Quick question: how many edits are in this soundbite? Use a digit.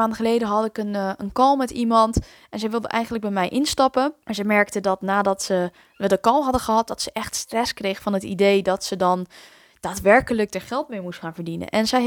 1